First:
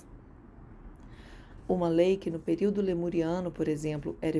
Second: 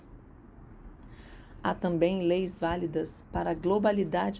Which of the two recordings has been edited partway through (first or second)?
first